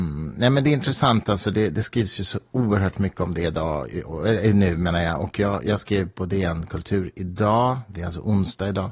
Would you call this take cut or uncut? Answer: uncut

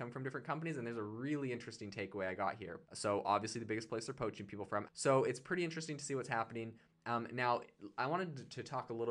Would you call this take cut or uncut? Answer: cut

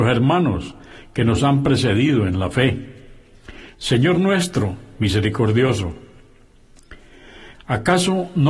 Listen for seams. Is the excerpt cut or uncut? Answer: cut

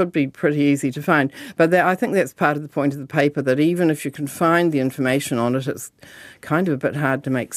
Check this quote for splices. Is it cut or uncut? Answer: uncut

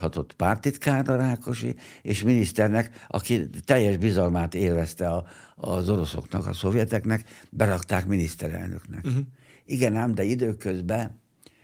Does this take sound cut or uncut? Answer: uncut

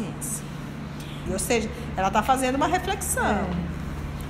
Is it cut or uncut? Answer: cut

